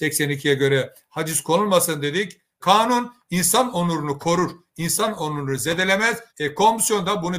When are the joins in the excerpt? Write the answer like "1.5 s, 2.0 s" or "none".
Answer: 2.6 s, 6.3 s

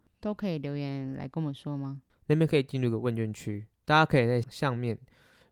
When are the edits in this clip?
2.1 s, 4.4 s

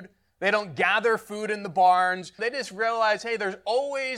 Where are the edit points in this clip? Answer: 2.4 s

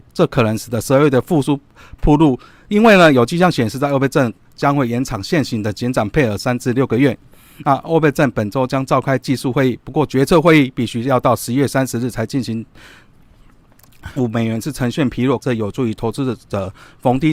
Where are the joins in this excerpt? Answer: 14.2 s, 15.4 s

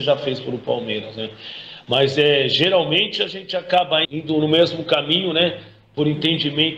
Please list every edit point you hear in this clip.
4.0 s

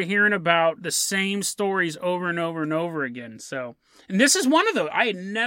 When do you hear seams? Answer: none

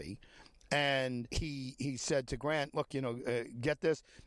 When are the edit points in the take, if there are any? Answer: 1.3 s

